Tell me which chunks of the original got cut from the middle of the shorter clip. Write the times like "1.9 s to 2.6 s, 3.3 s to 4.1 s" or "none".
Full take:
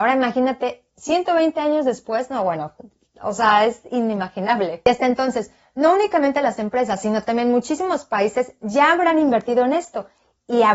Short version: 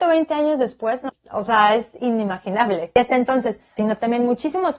2.4 s to 3.0 s, 5.7 s to 7.0 s